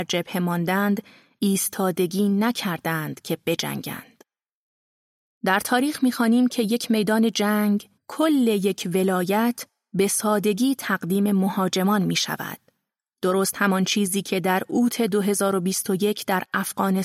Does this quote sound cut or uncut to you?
cut